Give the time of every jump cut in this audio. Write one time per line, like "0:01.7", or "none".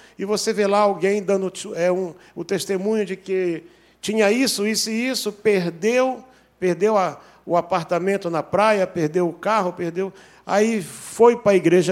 none

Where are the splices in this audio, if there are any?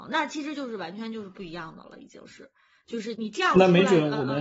0:03.1

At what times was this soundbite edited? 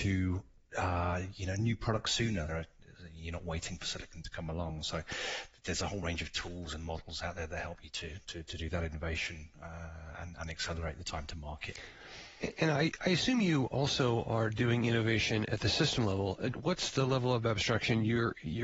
0:02.5
0:16.5

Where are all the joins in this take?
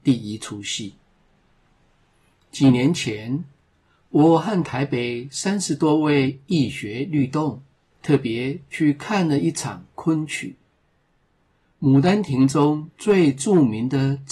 0:07.9

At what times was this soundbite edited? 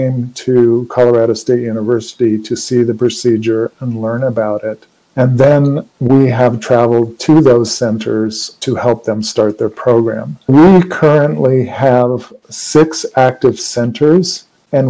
none

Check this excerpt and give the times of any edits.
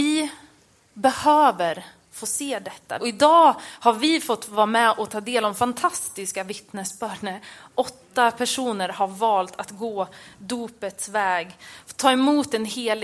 0:03.0

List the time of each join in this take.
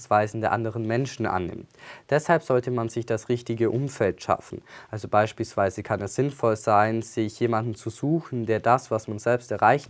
none

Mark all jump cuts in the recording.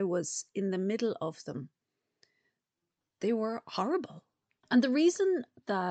0:04.6

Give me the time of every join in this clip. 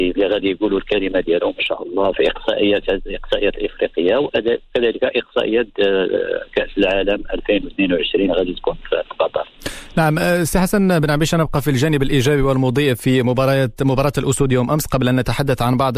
0:02.1

